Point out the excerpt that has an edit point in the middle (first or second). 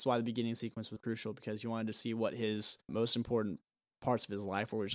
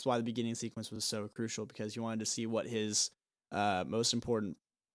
first